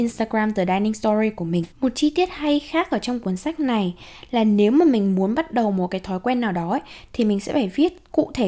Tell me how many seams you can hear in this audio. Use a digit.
1